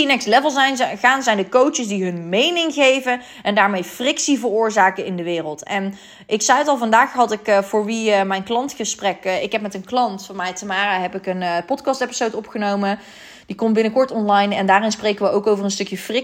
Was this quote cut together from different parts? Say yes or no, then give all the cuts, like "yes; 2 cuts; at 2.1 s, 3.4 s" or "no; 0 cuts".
no; 0 cuts